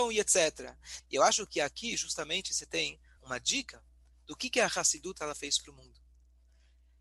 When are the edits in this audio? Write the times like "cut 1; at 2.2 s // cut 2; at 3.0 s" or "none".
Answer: cut 1; at 1.0 s // cut 2; at 3.2 s

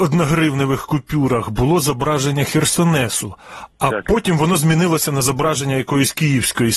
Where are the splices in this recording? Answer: none

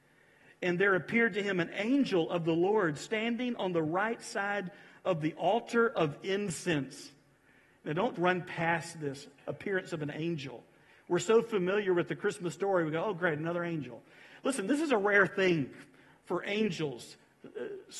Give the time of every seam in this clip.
cut 1; at 8.2 s

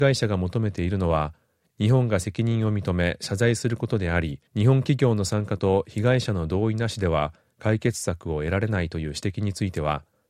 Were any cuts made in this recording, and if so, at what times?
cut 1; at 4.5 s

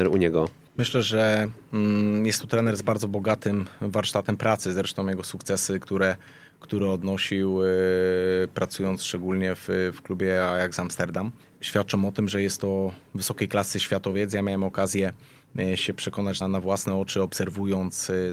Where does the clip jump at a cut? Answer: cut 1; at 16.4 s

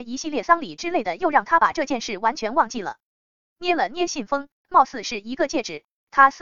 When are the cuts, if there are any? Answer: cut 1; at 4.5 s

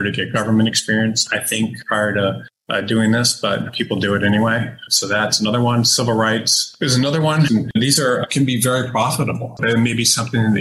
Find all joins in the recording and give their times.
cut 1; at 7.5 s // cut 2; at 9.6 s

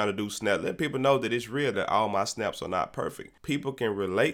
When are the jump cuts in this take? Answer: cut 1; at 1.7 s

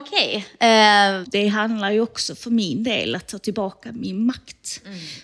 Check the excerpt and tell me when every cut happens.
cut 1; at 1.2 s

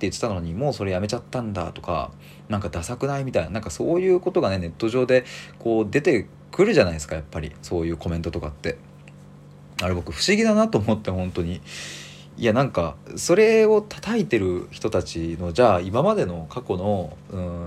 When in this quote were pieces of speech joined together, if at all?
cut 1; at 3.5 s

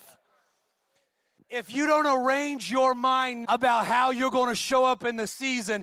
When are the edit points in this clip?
cut 1; at 1.4 s // cut 2; at 3.4 s

